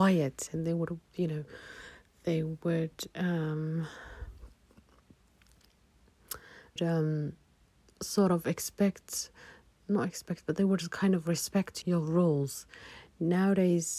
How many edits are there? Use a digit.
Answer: 2